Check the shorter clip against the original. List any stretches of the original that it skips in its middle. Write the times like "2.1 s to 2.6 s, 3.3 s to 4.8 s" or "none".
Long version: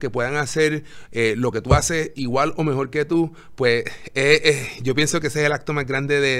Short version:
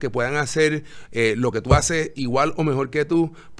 none

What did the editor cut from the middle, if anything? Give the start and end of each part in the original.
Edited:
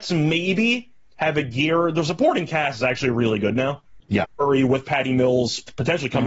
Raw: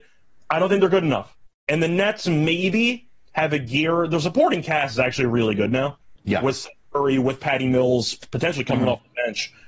6.4 s to 6.8 s

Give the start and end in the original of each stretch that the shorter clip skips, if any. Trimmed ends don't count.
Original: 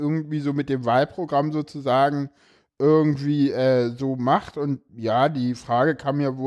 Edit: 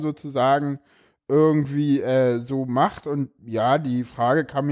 none

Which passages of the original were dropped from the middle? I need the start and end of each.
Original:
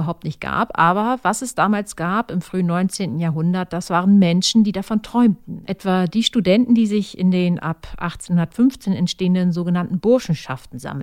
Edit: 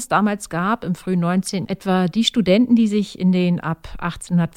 3.1 s to 5.6 s

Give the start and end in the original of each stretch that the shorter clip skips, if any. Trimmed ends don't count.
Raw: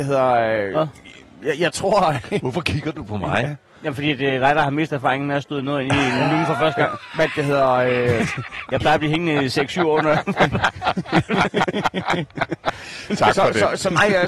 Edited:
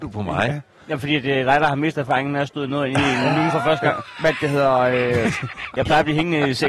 none

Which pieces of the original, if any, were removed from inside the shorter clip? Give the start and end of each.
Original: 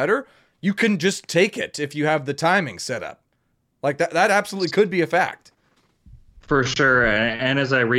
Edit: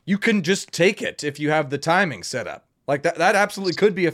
3.3 s to 3.7 s

